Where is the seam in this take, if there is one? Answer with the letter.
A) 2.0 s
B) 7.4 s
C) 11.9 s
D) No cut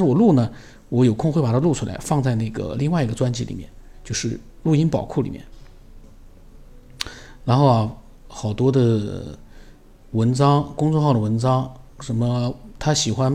D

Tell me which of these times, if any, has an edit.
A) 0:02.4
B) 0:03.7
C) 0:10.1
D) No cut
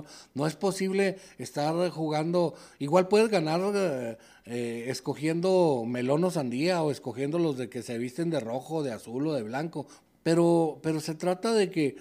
C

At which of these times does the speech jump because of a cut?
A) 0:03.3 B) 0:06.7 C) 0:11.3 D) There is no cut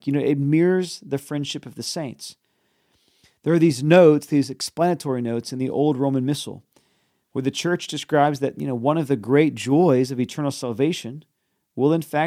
D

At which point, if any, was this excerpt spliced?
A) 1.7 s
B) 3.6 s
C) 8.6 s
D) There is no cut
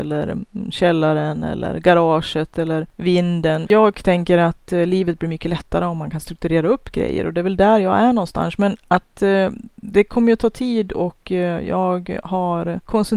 B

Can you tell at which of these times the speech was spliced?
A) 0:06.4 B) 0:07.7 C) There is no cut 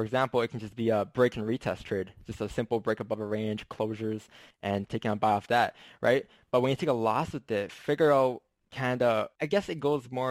C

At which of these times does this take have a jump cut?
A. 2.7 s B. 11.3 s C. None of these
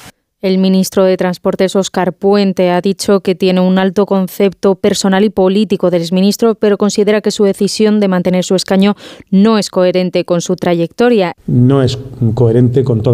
B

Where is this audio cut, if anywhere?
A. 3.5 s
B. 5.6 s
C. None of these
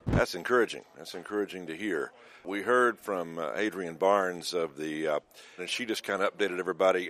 B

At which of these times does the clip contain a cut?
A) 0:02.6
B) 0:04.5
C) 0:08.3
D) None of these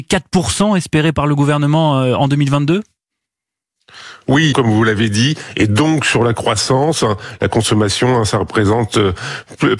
B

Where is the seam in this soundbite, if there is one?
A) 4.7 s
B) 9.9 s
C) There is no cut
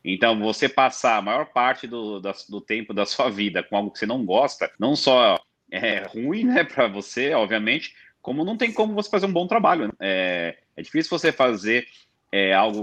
A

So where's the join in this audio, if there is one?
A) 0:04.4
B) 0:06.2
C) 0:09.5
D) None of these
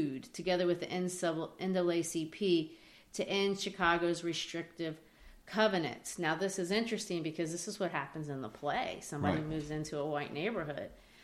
D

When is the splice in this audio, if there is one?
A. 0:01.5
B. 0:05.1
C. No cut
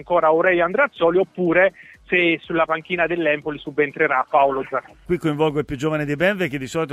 B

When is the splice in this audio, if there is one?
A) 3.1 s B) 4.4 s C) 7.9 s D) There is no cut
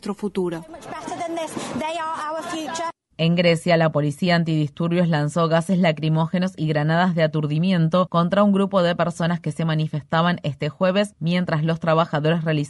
D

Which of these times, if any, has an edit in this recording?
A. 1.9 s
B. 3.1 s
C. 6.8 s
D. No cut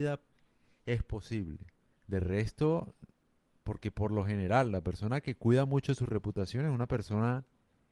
A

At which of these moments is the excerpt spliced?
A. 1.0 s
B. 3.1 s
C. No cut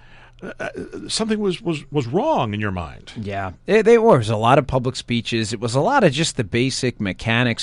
C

